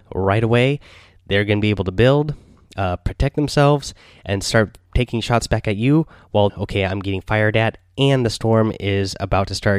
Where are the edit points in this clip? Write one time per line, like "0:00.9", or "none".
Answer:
0:06.5